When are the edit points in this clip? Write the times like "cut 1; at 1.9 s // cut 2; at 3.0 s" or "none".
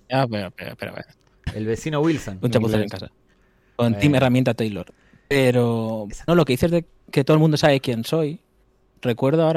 cut 1; at 6.3 s